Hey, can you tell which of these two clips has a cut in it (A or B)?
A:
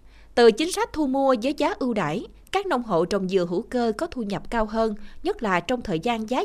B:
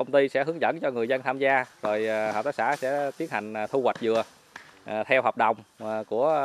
A